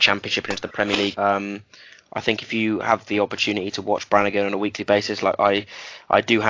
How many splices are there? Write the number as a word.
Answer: one